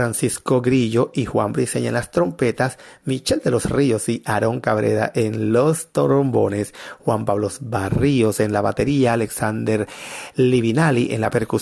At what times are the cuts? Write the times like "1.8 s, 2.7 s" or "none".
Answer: none